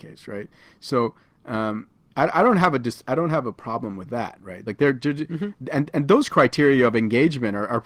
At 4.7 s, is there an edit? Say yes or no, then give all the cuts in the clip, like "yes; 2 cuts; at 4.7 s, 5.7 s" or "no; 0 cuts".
no; 0 cuts